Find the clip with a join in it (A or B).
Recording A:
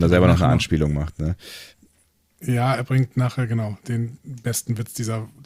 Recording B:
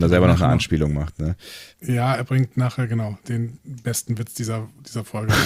B